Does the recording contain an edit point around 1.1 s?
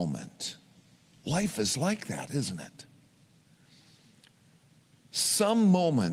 yes; 1 cut; at 1.1 s

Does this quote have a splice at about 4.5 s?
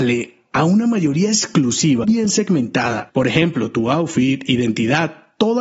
no; 2 cuts; at 2.0 s, 3.1 s

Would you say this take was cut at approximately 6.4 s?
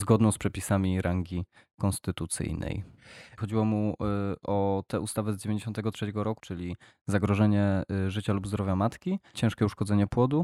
yes; 2 cuts; at 3.4 s, 6.4 s

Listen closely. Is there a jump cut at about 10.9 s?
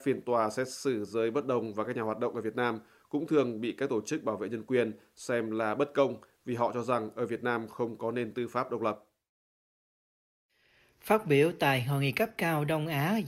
no; 0 cuts

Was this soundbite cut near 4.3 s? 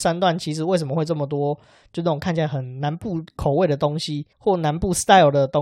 yes; 1 cut; at 4.3 s

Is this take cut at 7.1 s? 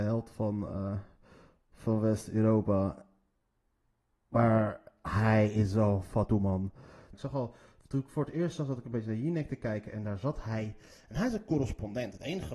yes; 1 cut; at 7.1 s

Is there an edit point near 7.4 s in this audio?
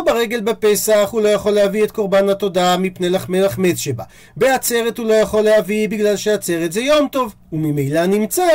yes; 1 cut; at 7.4 s

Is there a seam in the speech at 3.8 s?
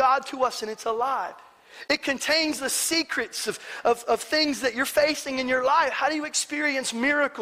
no; 0 cuts

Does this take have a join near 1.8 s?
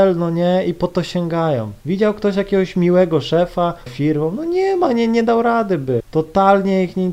yes; 3 cuts; at 1.8 s, 3.9 s, 6.0 s

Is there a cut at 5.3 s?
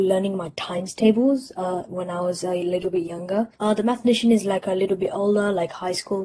no; 1 cut; at 3.6 s

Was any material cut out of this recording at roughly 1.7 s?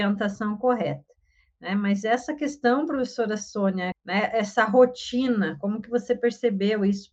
no; 1 cut; at 3.9 s

